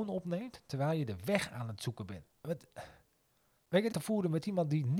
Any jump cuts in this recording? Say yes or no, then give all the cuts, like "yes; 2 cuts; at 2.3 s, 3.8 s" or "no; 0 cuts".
yes; 2 cuts; at 2.3 s, 3.9 s